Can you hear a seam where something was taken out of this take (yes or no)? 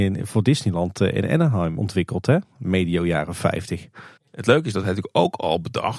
yes